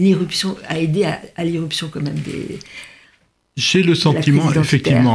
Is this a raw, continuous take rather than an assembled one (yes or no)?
yes